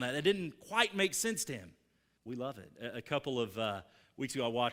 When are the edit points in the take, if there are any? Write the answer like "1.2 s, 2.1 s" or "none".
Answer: 2.2 s